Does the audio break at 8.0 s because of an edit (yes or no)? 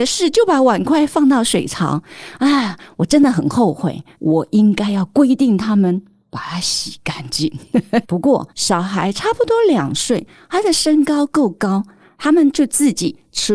yes